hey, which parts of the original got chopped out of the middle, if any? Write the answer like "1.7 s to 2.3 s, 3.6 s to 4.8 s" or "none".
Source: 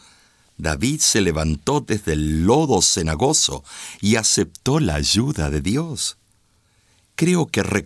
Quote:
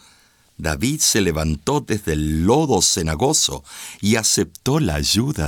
none

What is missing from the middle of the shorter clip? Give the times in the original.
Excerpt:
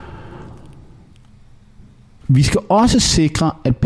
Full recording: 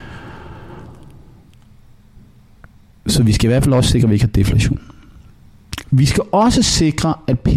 2.6 s to 5.8 s

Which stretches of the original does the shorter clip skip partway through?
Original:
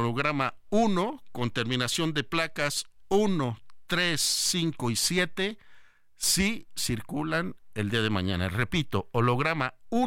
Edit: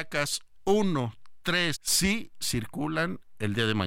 4.2 s to 6.1 s

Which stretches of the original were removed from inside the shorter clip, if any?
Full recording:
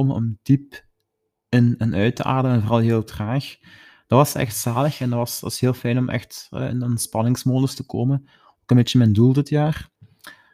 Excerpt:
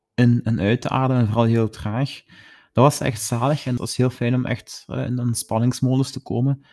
5.1 s to 5.4 s

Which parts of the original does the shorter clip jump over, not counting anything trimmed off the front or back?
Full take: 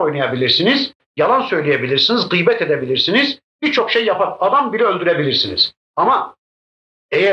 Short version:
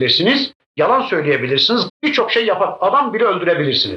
2.3 s to 3.5 s

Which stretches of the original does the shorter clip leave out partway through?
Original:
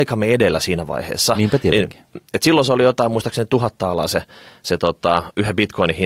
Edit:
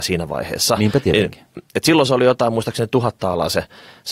none

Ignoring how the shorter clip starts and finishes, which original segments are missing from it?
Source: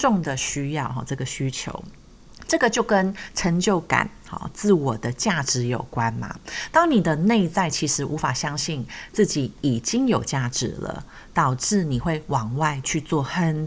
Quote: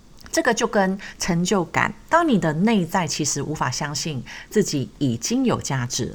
4.2 s to 6.7 s

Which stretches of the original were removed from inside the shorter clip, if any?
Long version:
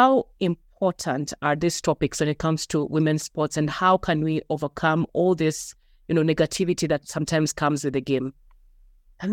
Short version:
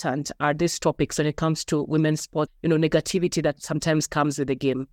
3.5 s to 5.9 s

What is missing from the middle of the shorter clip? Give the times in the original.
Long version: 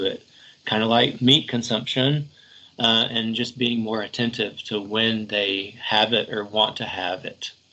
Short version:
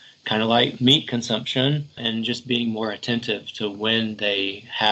2.4 s to 3.1 s

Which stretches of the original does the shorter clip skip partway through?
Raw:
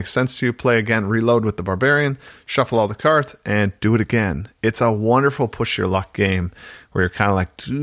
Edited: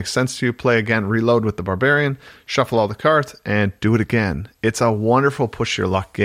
none

